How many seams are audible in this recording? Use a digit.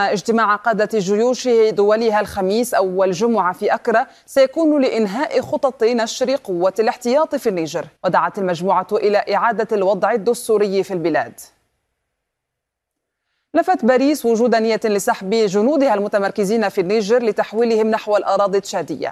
1